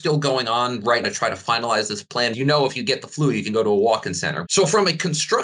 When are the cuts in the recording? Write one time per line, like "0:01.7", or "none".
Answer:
0:01.0
0:02.3
0:04.4